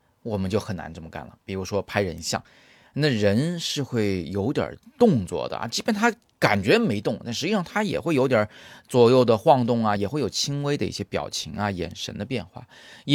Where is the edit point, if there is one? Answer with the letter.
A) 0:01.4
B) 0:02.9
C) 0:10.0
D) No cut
D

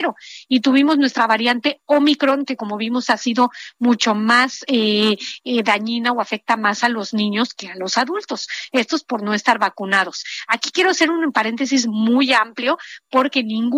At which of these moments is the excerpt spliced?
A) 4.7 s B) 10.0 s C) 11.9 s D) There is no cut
D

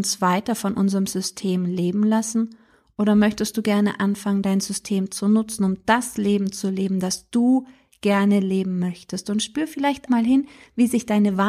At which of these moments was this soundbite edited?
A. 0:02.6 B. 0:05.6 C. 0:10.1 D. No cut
C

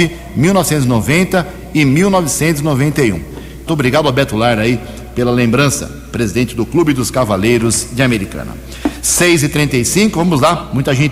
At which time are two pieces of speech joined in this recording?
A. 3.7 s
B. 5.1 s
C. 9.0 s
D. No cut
A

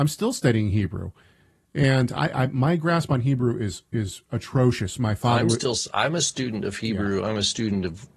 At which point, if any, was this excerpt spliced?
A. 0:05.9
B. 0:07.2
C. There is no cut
C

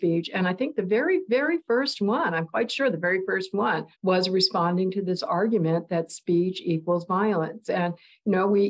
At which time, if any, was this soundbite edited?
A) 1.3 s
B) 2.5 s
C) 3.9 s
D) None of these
C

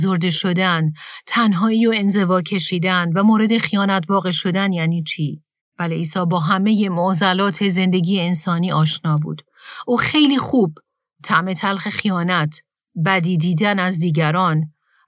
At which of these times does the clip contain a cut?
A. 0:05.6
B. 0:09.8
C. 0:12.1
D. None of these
A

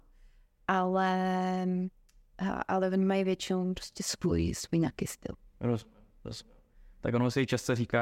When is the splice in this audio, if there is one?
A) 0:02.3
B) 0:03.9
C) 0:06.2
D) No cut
D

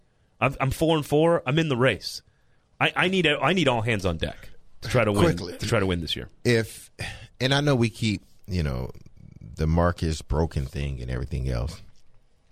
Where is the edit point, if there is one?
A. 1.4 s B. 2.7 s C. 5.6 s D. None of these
D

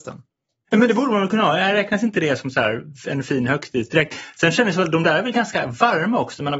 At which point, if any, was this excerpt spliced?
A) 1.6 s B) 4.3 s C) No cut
C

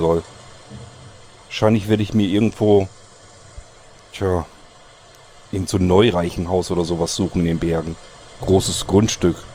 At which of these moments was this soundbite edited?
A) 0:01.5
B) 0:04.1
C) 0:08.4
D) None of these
C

